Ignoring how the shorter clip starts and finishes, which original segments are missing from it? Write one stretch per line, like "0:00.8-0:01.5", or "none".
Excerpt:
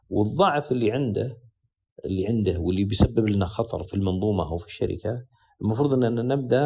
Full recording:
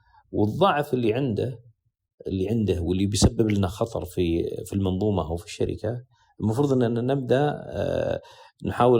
0:04.1-0:04.6